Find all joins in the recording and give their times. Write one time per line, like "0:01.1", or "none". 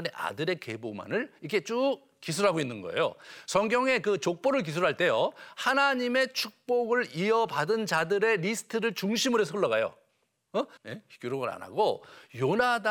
0:10.8